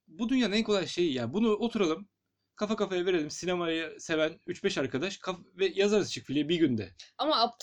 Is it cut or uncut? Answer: uncut